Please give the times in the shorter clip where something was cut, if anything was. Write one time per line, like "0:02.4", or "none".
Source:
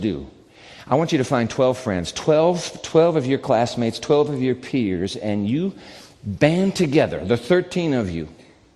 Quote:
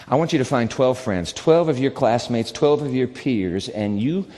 0:01.3